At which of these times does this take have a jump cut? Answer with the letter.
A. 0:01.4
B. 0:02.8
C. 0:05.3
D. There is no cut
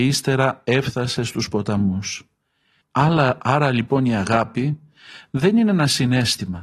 B